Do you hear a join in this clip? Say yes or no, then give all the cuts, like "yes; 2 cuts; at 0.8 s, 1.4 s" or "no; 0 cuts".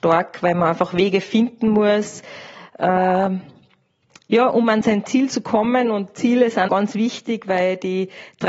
yes; 1 cut; at 6.7 s